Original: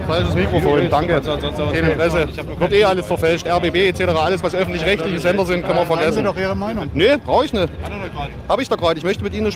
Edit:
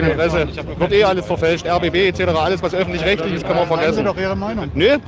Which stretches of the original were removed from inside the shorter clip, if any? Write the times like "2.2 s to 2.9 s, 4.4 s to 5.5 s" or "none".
5.2 s to 5.6 s